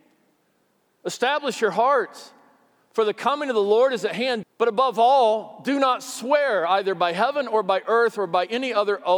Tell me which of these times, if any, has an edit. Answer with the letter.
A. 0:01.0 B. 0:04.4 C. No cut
B